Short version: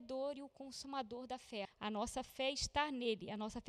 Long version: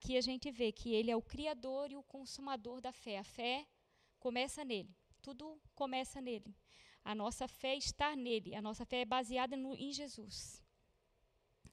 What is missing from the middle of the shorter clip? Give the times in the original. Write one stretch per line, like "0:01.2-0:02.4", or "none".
0:03.2-0:06.9